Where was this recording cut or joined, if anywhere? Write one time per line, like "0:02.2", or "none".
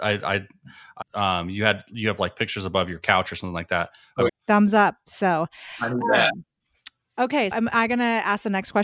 0:01.0
0:04.3
0:07.5